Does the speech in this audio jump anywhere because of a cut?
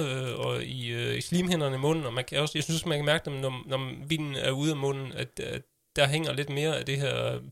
no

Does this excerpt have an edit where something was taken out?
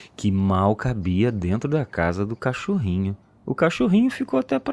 no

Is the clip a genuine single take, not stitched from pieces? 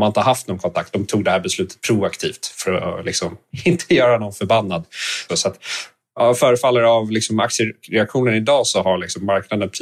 no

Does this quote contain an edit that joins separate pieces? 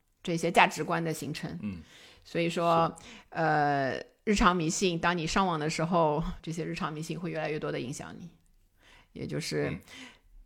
yes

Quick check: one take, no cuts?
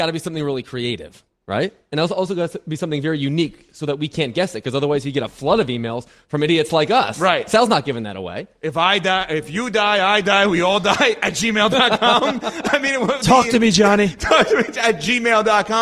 yes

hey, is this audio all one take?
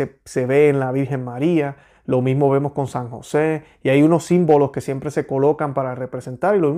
yes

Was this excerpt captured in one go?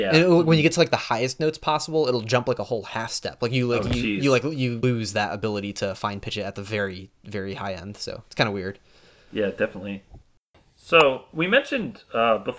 yes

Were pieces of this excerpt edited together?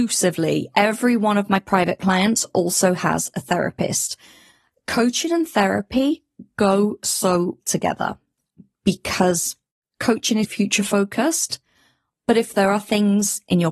yes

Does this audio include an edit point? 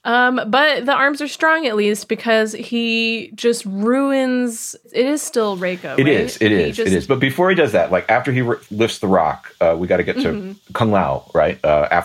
no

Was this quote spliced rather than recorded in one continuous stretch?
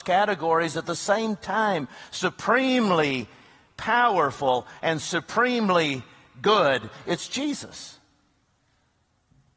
no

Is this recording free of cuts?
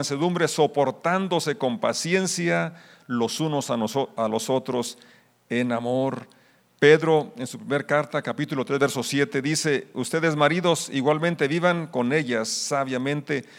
yes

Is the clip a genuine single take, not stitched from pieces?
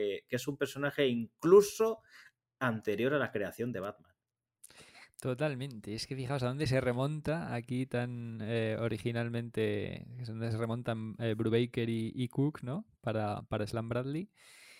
yes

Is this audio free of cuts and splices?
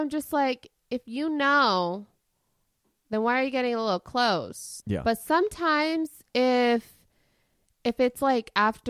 no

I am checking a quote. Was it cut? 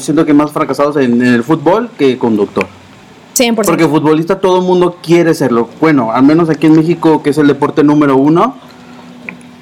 no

